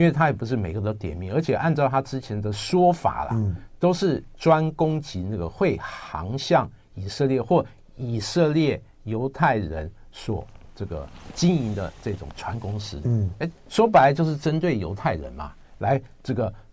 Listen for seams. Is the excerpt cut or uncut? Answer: cut